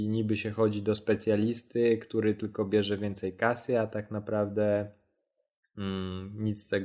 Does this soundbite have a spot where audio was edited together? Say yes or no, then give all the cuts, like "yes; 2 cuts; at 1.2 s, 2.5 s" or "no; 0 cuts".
no; 0 cuts